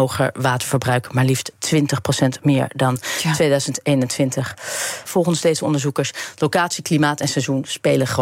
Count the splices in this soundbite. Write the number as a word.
one